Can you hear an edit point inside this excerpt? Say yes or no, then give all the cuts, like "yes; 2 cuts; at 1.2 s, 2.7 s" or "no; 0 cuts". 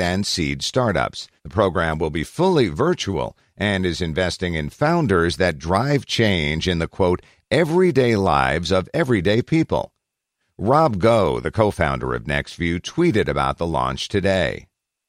yes; 1 cut; at 1.4 s